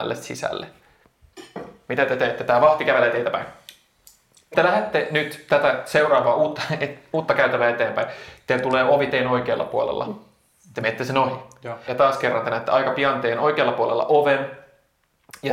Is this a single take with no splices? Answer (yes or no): no